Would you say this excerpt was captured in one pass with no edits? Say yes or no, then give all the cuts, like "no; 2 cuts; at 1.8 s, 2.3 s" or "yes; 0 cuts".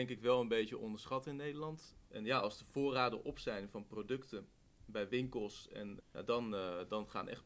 no; 2 cuts; at 2.1 s, 6.0 s